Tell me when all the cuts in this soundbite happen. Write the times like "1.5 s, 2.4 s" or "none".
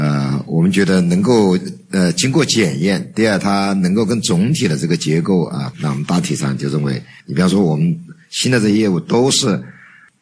5.7 s, 7.2 s